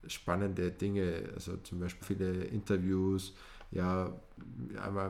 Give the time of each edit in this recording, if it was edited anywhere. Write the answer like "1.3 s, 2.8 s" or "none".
2.0 s